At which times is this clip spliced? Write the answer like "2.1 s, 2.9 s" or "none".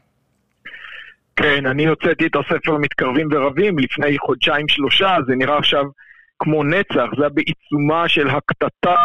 none